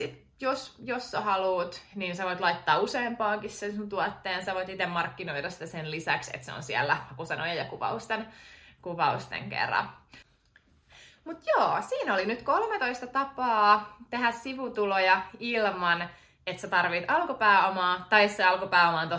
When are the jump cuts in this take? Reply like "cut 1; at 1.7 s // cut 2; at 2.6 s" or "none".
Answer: none